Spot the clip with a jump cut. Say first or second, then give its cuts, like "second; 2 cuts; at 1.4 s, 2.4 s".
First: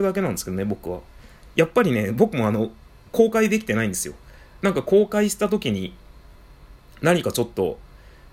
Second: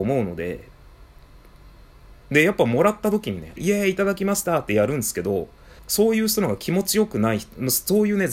second; 2 cuts; at 3.6 s, 5.8 s